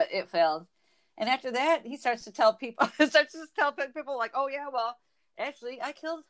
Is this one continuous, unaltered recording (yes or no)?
yes